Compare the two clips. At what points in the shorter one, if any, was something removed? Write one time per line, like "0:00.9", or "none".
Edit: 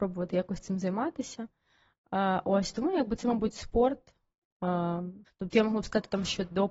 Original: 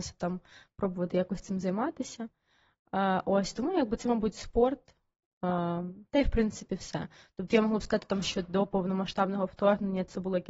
0:05.3